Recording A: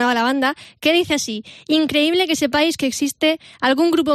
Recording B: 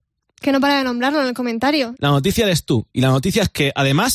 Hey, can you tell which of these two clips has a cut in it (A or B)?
B